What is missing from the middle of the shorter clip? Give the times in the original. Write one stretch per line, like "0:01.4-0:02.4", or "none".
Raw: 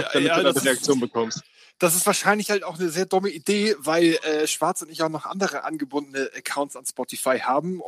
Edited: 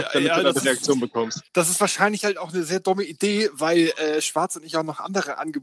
0:01.5-0:01.7